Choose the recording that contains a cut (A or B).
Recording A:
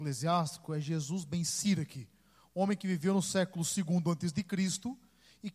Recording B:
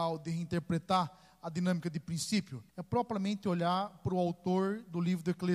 B